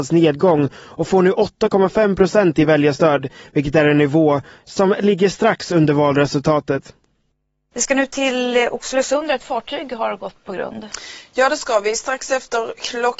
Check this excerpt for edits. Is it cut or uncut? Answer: cut